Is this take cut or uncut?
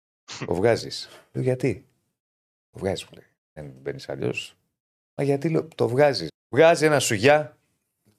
cut